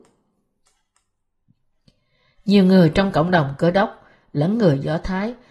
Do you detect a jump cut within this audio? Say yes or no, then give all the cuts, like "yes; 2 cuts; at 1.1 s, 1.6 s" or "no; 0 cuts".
no; 0 cuts